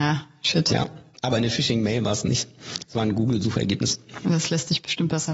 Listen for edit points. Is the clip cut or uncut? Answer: uncut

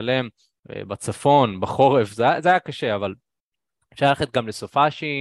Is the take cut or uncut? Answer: uncut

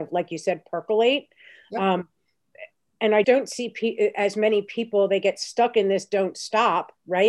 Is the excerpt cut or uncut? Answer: cut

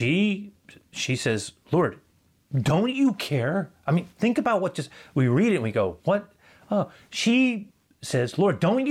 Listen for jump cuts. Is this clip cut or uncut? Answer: uncut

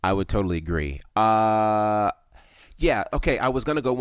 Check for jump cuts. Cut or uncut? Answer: cut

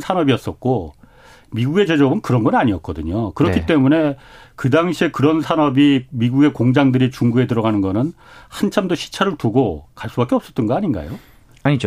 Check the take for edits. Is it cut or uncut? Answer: uncut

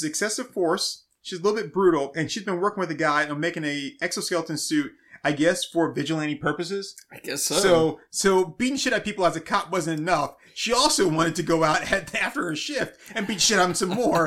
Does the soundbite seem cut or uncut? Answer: uncut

